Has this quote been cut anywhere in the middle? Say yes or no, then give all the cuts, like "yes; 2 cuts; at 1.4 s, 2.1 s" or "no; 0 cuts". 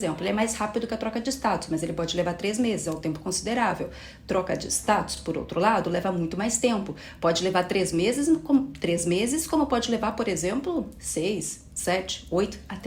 no; 0 cuts